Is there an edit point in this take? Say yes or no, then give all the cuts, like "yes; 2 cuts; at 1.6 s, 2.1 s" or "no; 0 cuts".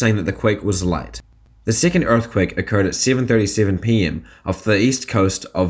no; 0 cuts